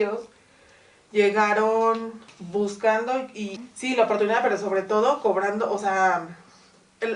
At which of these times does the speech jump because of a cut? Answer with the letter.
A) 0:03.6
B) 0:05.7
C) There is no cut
A